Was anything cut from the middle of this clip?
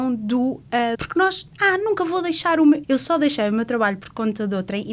yes; 2 cuts; at 0.9 s, 2.8 s

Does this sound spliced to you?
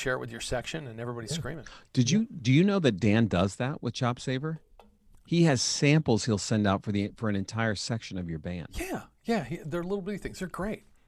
no; 0 cuts

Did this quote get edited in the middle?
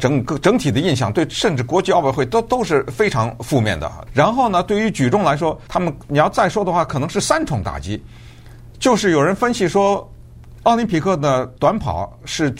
yes; 3 cuts; at 4.1 s, 5.7 s, 10.5 s

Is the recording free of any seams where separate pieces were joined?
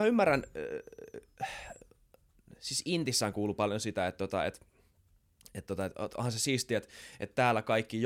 yes; 0 cuts

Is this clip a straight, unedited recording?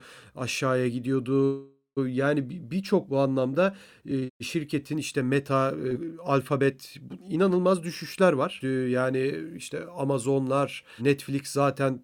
no; 1 cut; at 8.6 s

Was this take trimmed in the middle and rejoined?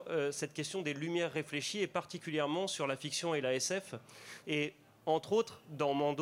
yes; 1 cut; at 4.4 s

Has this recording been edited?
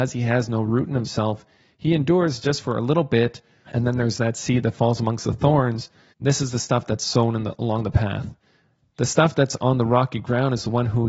yes; 2 cuts; at 3.7 s, 6.1 s

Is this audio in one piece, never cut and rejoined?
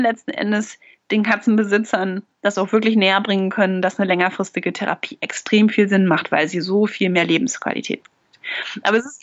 yes; 0 cuts

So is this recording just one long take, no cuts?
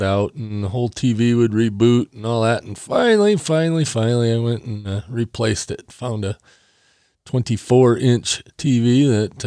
yes; 0 cuts

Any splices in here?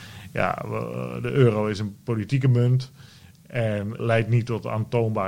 yes; 1 cut; at 4.0 s

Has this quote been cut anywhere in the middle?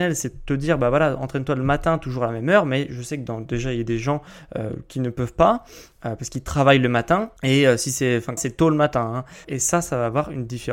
yes; 3 cuts; at 7.4 s, 8.4 s, 9.4 s

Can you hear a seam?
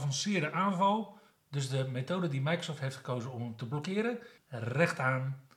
yes; 1 cut; at 4.4 s

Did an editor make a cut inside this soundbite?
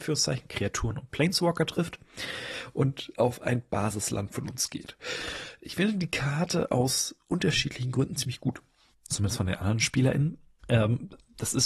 yes; 2 cuts; at 8.9 s, 10.6 s

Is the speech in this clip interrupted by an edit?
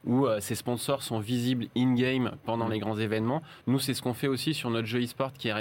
no; 0 cuts

